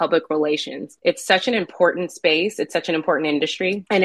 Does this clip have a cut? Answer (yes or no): no